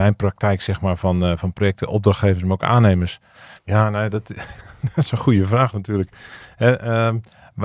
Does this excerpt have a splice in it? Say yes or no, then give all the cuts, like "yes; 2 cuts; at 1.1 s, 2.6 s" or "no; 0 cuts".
yes; 1 cut; at 3.6 s